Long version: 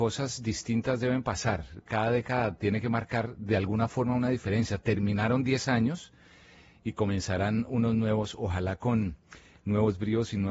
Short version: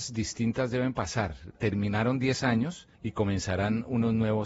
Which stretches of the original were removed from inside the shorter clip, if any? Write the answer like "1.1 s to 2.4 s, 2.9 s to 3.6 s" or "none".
1.8 s to 4.8 s, 6.2 s to 6.8 s